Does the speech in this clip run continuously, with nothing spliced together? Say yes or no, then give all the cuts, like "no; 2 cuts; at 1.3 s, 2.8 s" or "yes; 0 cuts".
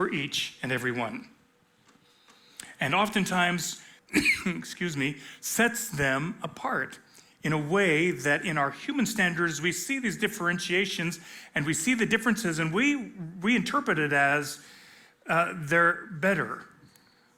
no; 1 cut; at 4.0 s